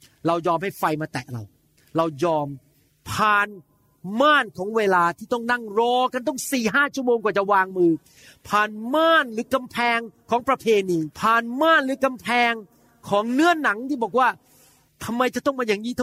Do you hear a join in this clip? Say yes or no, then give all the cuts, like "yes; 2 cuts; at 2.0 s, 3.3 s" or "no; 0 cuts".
yes; 1 cut; at 11.1 s